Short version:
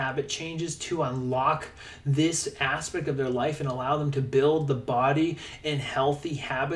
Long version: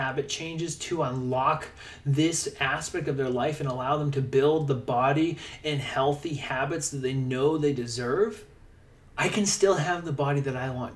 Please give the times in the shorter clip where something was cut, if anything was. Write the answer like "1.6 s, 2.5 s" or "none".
none